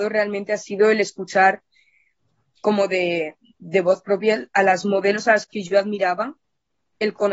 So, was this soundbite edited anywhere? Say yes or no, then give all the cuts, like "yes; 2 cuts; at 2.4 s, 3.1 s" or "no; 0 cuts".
no; 0 cuts